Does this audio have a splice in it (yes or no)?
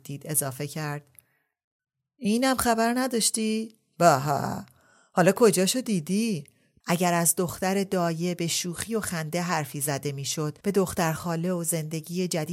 yes